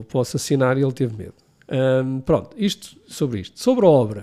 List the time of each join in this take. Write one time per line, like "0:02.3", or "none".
none